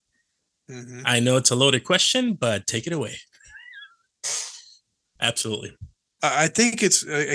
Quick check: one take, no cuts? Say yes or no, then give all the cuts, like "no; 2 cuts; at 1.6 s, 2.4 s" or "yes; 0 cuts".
no; 1 cut; at 5.2 s